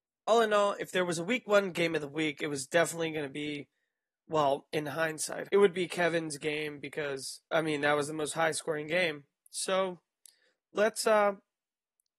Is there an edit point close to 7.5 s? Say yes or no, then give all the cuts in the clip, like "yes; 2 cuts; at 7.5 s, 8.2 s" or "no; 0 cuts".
yes; 2 cuts; at 5.5 s, 7.5 s